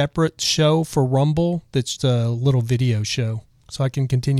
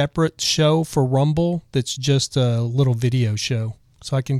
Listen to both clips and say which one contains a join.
first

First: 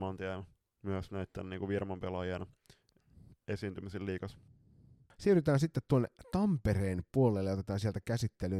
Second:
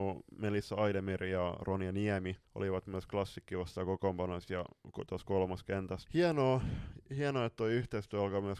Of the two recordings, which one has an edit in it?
second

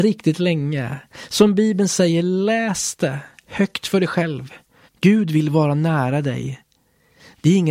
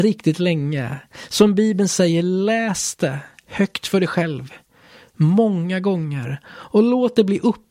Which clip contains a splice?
first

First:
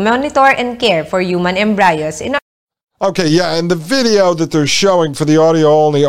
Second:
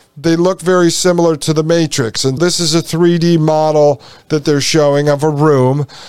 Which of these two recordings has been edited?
second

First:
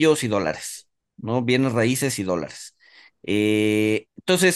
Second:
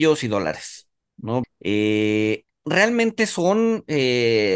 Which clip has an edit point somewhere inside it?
second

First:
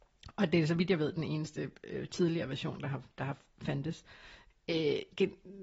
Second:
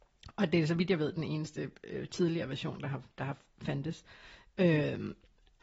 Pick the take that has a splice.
first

